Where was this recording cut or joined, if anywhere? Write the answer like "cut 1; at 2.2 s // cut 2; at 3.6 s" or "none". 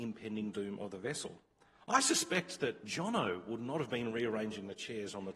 cut 1; at 2.8 s